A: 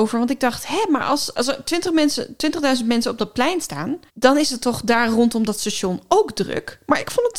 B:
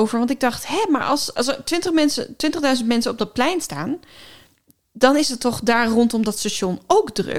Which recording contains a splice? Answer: A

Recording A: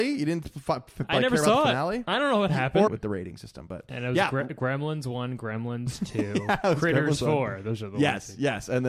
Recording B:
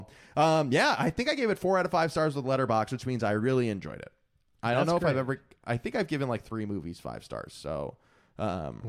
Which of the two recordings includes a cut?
A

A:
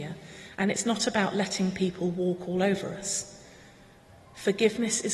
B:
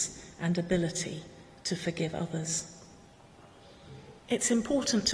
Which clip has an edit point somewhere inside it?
B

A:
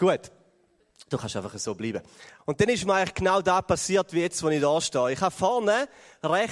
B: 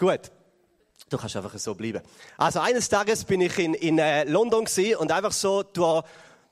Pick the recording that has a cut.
A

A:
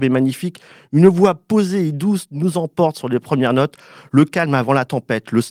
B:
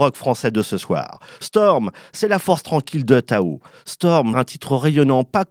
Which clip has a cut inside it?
B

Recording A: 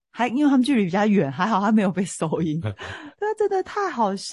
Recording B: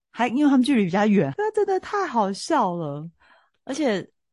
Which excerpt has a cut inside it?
B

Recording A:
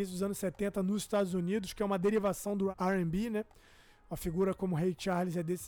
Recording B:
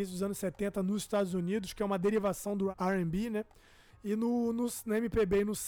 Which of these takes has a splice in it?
B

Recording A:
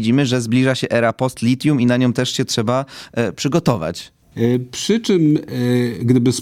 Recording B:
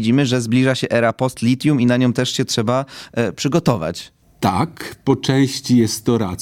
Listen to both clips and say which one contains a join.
A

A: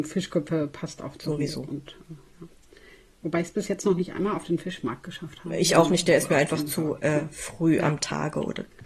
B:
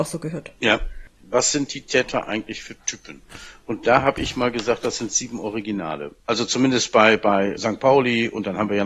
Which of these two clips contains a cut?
B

